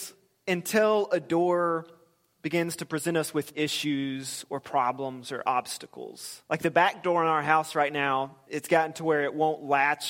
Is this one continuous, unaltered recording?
no; 2 cuts; at 6.5 s, 8.5 s

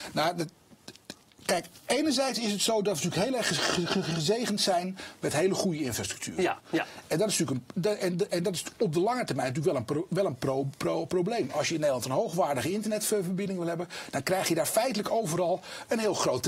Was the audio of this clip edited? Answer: yes; 1 cut; at 6.6 s

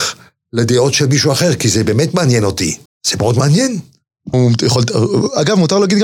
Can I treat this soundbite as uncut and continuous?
no; 2 cuts; at 2.9 s, 4.3 s

